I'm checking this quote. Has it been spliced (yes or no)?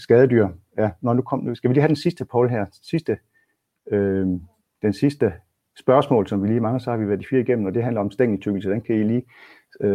no